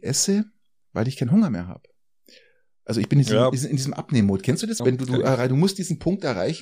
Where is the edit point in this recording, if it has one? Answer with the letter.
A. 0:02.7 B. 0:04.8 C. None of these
B